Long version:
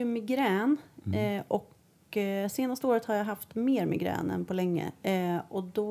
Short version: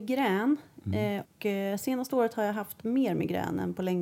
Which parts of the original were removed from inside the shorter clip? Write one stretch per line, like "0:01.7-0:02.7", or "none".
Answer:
0:01.4-0:02.0